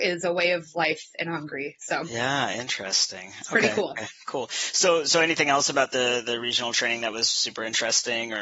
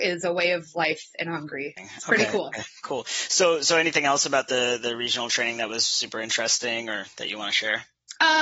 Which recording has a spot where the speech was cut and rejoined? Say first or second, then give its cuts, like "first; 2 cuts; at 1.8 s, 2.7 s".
second; 1 cut; at 1.8 s